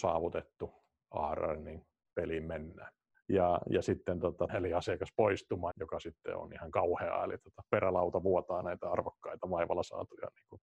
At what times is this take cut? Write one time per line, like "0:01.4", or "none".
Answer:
0:03.1
0:04.5
0:05.7